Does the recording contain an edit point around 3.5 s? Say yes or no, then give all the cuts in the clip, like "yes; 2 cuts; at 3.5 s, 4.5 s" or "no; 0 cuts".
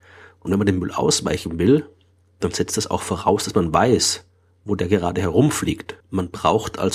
no; 1 cut; at 6.0 s